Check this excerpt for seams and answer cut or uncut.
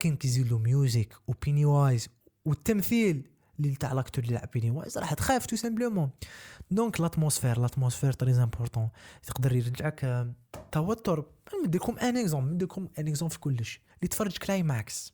cut